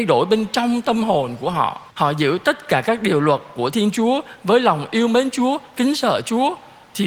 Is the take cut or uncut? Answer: cut